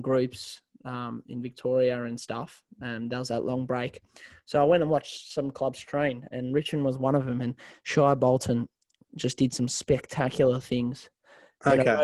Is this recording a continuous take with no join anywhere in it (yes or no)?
yes